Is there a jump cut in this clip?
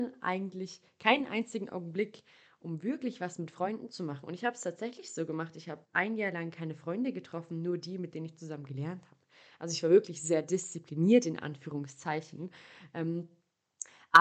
no; 0 cuts

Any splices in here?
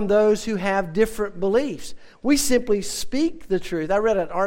no; 0 cuts

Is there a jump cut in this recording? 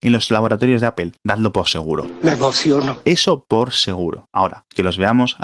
no; 0 cuts

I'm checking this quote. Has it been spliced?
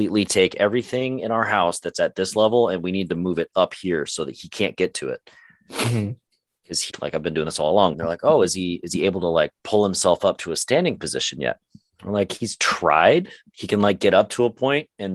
yes; 2 cuts; at 6.9 s, 7.9 s

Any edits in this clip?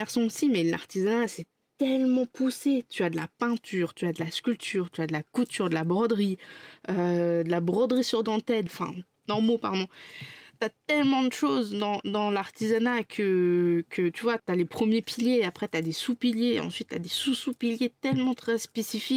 yes; 2 cuts; at 8.7 s, 14.4 s

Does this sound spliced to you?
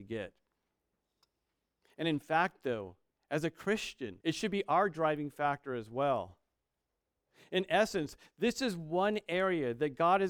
yes; 1 cut; at 4.2 s

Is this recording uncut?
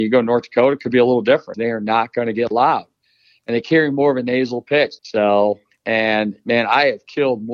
no; 2 cuts; at 1.5 s, 5.0 s

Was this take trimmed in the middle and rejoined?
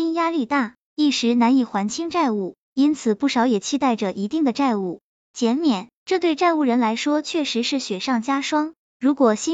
yes; 1 cut; at 6.0 s

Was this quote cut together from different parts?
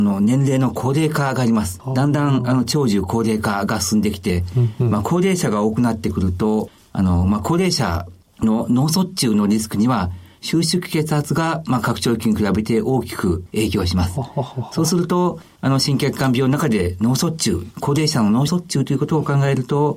no; 0 cuts

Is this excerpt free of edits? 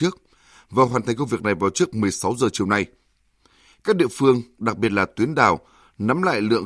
yes; 0 cuts

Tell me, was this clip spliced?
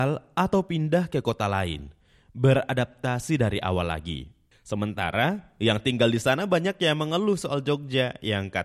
yes; 1 cut; at 4.5 s

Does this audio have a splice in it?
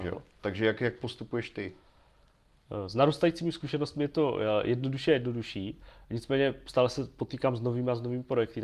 no; 0 cuts

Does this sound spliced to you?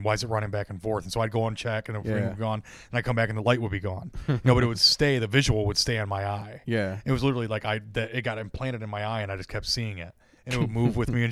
no; 0 cuts

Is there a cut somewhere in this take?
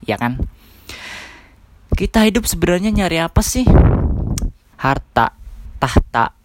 yes; 1 cut; at 4.7 s

